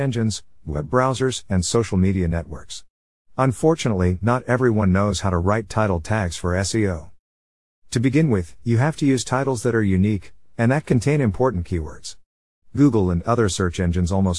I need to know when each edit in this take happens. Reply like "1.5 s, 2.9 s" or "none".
10.5 s, 12.6 s